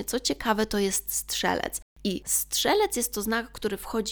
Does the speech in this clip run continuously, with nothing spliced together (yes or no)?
yes